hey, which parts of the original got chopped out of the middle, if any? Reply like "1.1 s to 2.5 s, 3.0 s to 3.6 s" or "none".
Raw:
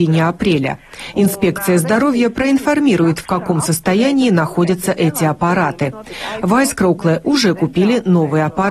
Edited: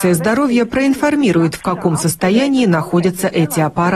none

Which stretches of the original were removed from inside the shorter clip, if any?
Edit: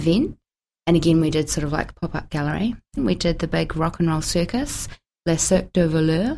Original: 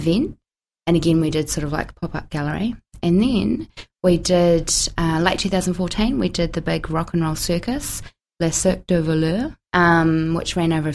3.0 s to 6.1 s

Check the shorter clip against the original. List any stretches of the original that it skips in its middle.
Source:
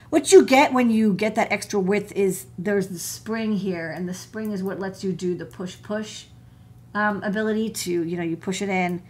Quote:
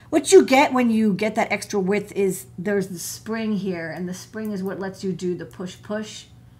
none

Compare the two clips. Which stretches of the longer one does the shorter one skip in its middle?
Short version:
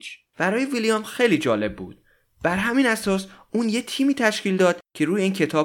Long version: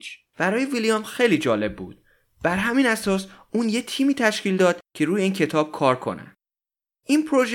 none

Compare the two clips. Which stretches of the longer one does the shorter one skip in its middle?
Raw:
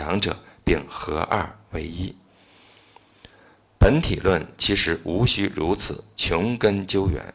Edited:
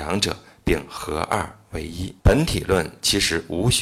2.2 s to 3.8 s

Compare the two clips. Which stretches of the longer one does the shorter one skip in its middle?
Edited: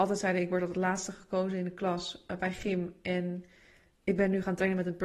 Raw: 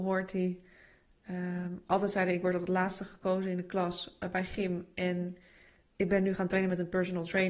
none

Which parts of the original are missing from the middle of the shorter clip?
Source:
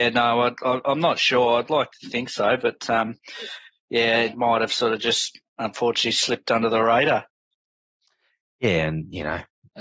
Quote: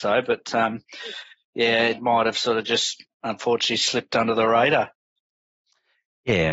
none

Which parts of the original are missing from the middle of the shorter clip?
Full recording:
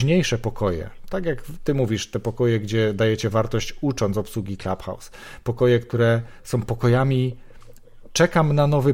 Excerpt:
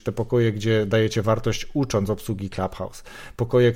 none

